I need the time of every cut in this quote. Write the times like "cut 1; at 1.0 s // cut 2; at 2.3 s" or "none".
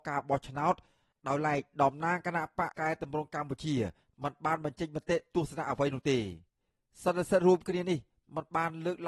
cut 1; at 2.7 s